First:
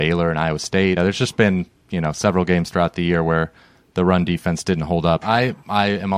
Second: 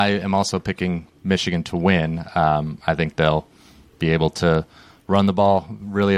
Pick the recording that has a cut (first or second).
first